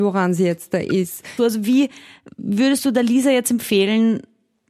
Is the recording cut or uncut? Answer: cut